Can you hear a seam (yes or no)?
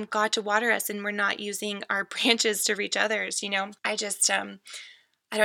no